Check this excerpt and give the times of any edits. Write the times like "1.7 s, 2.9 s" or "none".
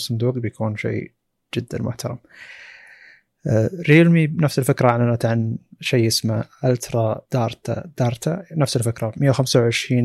7.2 s